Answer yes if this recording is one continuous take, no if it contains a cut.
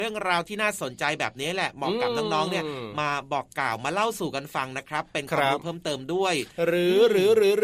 yes